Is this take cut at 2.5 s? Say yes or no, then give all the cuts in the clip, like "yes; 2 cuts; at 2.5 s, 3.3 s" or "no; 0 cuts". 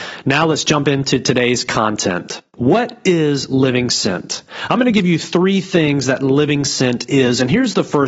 yes; 1 cut; at 2.5 s